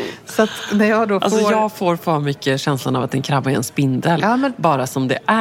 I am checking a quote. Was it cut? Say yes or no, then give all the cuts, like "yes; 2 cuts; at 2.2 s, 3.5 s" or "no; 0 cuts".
no; 0 cuts